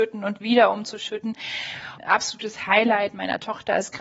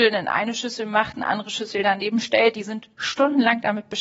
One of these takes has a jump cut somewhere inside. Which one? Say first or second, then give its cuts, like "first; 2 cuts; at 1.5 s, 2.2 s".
first; 1 cut; at 2.0 s